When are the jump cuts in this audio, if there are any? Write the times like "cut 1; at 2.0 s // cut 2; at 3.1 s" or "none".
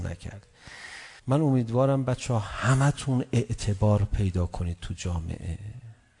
cut 1; at 1.2 s